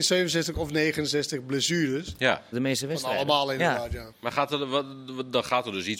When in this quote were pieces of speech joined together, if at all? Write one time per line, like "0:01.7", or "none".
0:02.5
0:04.1